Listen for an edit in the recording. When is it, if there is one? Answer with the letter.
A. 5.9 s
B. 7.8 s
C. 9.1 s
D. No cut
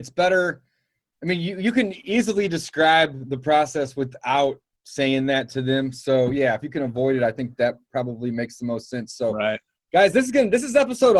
D